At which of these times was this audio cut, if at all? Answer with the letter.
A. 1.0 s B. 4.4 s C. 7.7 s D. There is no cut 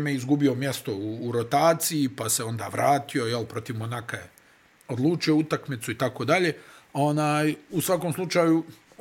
C